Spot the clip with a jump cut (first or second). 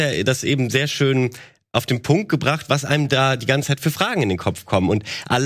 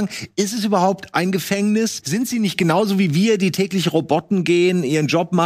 second